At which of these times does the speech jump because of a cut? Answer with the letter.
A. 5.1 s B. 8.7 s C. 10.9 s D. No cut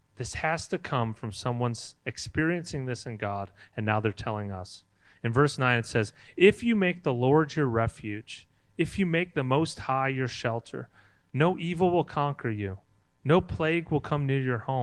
D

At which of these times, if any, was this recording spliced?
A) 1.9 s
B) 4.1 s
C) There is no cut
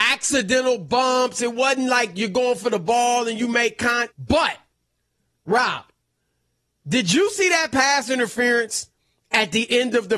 B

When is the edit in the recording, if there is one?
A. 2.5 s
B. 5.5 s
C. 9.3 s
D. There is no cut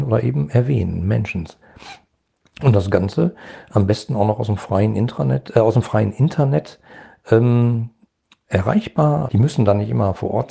C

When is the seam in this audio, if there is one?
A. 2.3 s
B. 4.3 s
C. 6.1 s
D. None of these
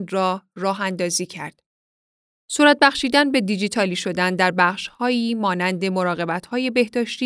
A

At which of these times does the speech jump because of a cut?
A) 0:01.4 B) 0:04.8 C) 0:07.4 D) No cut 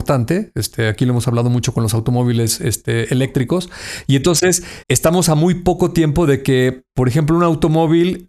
B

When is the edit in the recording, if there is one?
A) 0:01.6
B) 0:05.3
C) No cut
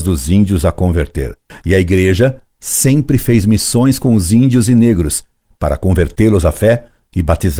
C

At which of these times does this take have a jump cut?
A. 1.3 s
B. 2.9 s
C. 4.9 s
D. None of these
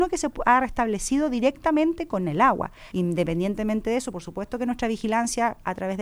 B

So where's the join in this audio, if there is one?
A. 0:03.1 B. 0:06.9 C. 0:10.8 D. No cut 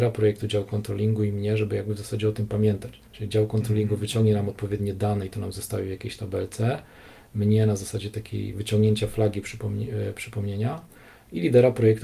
A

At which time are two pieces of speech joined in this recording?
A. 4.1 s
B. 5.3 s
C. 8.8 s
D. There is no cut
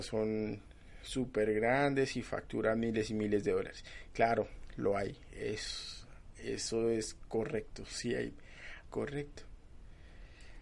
C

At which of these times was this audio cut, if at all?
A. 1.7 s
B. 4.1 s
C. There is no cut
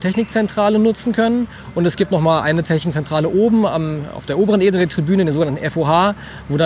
C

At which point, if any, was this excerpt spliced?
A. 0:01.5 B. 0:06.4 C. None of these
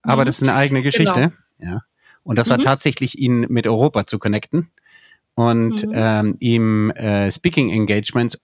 A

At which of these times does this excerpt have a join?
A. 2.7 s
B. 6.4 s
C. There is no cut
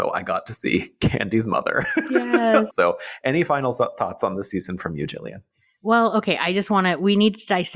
A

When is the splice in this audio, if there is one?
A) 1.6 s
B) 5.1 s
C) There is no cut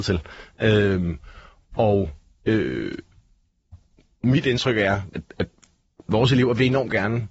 B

